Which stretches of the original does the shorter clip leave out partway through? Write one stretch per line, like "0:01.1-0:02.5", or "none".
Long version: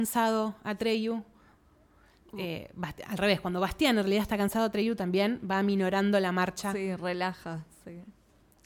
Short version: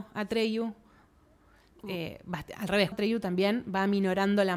0:03.4-0:04.7